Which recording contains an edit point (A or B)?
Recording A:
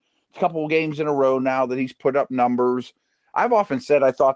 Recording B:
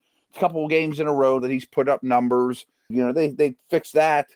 B